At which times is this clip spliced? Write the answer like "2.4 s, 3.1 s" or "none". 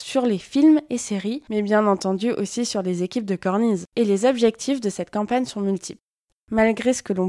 3.9 s, 6.3 s